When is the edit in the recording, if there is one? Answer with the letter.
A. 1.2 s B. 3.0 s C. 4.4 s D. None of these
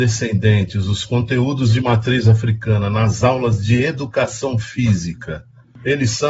D